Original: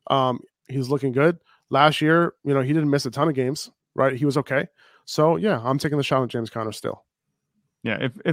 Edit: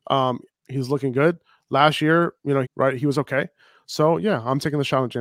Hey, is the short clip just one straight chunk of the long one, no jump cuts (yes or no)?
no